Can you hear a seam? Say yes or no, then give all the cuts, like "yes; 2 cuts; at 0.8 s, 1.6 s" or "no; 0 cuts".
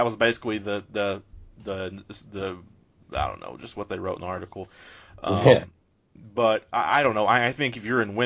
no; 0 cuts